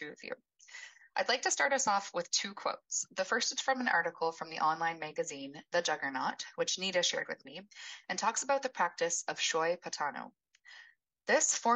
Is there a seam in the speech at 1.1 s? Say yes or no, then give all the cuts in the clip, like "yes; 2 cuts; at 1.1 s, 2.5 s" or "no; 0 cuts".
no; 0 cuts